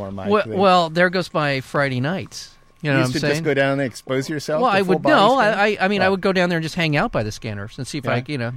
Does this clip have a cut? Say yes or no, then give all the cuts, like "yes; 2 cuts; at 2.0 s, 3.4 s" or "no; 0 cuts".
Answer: no; 0 cuts